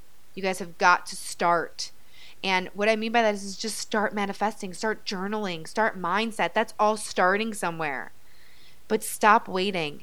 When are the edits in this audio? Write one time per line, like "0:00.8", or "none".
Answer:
none